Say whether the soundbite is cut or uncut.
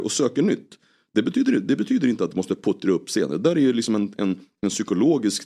uncut